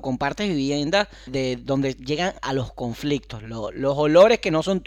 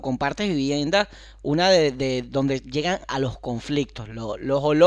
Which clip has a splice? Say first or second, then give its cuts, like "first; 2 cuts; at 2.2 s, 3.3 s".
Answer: first; 1 cut; at 1.3 s